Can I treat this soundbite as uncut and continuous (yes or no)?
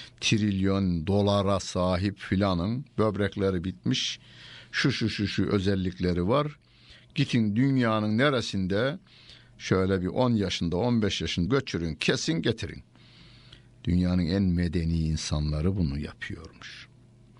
no